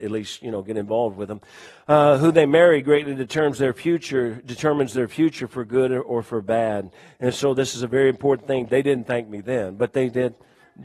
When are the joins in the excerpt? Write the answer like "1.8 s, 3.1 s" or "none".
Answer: 8.7 s